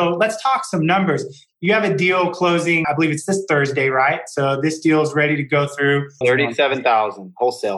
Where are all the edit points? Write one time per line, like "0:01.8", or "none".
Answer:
0:02.8
0:06.2

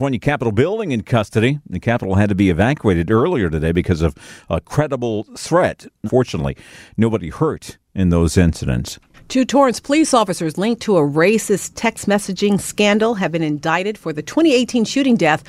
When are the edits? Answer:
0:06.1

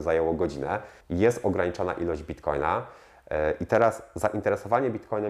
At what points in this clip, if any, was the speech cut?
0:01.0

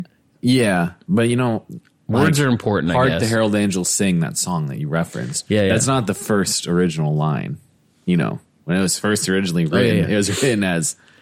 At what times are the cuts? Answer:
none

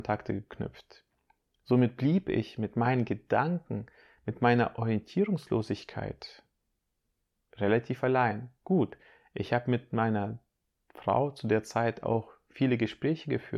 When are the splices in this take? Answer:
0:08.6

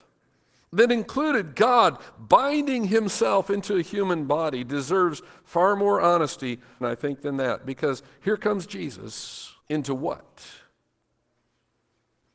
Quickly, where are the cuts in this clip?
0:06.8
0:09.6

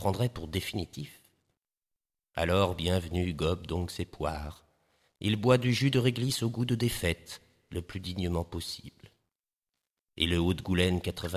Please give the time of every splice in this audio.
none

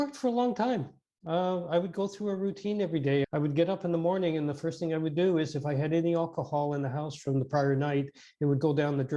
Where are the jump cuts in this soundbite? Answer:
0:03.2

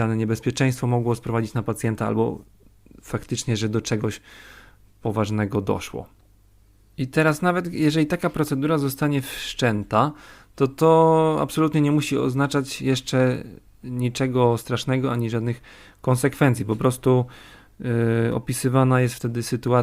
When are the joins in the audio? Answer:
none

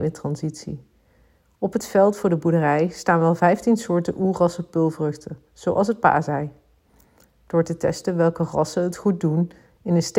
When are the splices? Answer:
none

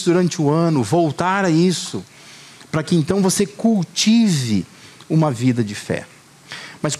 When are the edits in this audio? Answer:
none

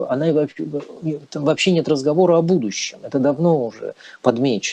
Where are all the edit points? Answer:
none

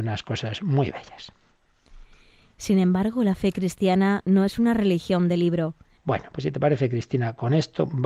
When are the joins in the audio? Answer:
0:05.9

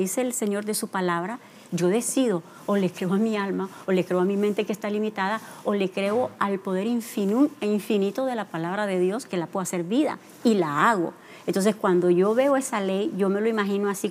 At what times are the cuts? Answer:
0:09.3

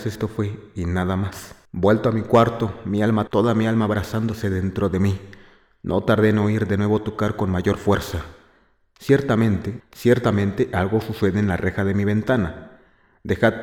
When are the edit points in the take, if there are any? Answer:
0:01.7
0:03.3
0:09.8

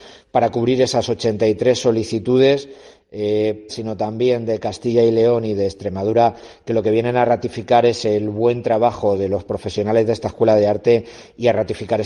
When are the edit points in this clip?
0:03.7

